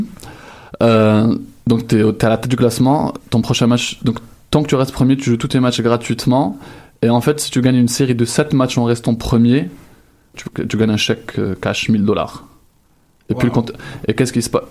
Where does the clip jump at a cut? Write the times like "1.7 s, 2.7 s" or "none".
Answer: 10.3 s